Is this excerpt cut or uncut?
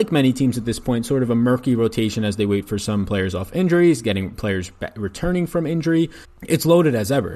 cut